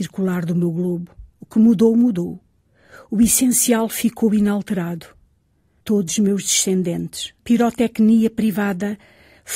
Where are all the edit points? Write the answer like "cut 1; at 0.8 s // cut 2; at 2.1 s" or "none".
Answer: cut 1; at 1.3 s // cut 2; at 5.8 s // cut 3; at 7.4 s